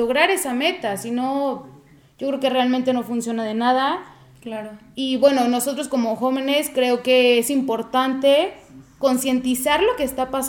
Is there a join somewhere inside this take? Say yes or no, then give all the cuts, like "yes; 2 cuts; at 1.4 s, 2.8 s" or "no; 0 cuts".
no; 0 cuts